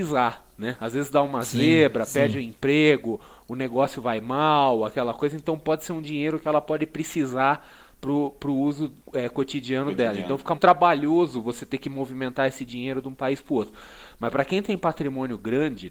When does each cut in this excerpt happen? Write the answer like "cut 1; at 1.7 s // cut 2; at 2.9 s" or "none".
cut 1; at 9.0 s // cut 2; at 10.5 s